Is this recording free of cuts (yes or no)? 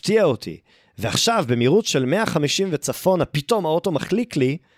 yes